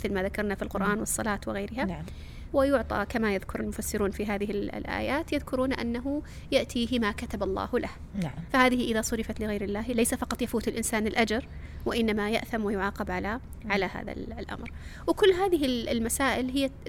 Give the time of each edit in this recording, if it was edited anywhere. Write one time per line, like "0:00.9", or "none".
0:02.5
0:08.5